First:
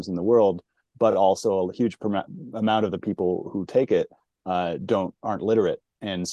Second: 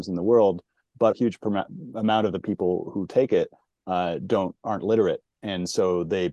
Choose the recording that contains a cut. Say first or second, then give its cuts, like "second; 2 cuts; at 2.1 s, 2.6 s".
second; 1 cut; at 1.1 s